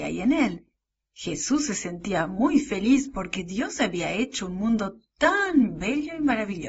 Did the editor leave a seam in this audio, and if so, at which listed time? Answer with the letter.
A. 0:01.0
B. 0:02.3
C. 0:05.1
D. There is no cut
D